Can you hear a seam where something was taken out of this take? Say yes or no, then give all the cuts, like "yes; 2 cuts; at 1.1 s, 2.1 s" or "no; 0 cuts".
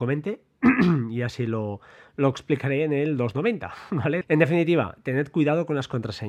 yes; 1 cut; at 4.2 s